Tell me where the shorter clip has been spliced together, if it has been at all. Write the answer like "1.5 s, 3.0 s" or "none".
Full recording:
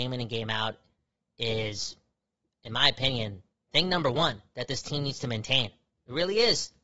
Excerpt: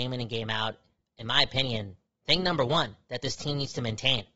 1.0 s